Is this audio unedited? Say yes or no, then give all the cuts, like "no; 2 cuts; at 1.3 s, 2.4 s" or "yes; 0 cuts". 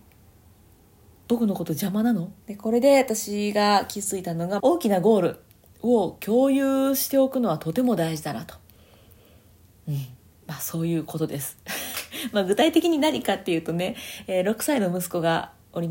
no; 2 cuts; at 2.4 s, 4.6 s